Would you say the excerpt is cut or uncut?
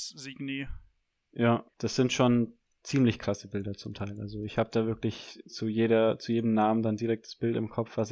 uncut